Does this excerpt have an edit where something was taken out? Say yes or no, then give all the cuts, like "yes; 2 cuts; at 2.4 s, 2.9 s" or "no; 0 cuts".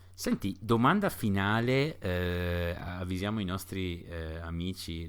no; 0 cuts